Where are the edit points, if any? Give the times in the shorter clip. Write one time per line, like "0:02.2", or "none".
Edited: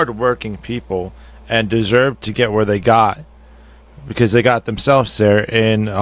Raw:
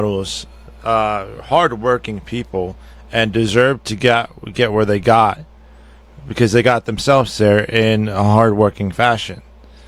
0:02.3